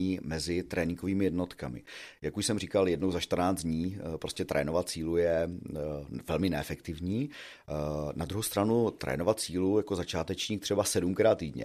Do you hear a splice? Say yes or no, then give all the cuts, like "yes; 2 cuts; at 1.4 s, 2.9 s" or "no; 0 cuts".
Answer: no; 0 cuts